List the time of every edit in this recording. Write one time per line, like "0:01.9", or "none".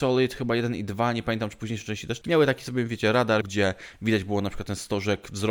0:02.2
0:03.4